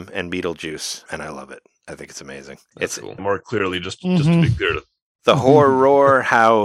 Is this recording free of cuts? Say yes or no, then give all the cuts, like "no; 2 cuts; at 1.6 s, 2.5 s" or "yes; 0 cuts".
no; 2 cuts; at 1.1 s, 3.2 s